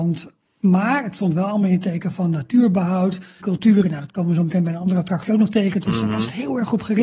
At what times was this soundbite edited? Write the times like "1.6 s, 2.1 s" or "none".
3.4 s